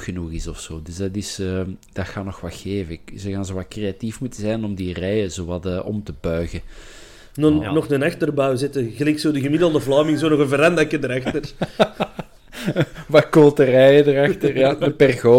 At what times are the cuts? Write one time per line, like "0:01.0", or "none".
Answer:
none